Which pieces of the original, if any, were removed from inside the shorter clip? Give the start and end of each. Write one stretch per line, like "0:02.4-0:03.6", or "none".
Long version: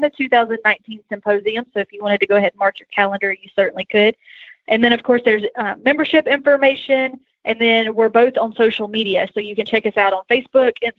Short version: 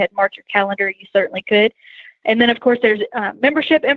none